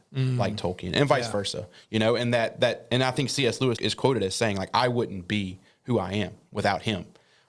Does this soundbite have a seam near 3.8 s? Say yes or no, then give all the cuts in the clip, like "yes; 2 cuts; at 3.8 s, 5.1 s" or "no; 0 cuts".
yes; 1 cut; at 3.8 s